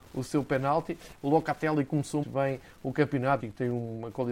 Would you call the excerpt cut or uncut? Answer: cut